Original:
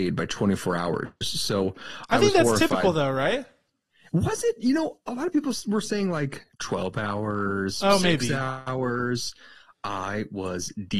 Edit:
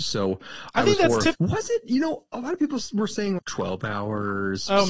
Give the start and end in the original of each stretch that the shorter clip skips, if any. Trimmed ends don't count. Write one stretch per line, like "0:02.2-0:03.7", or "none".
0:02.7-0:04.1
0:06.1-0:06.5